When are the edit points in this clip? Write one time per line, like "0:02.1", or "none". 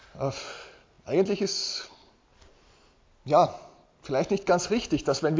none